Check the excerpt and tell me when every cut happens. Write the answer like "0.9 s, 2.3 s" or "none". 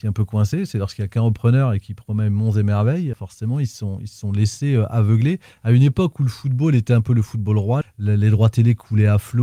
3.1 s, 7.8 s